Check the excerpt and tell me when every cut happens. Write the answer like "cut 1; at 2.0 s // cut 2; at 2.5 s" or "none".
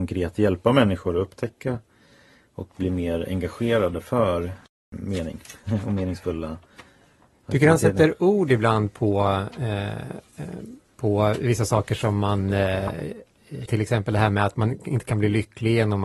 cut 1; at 13.7 s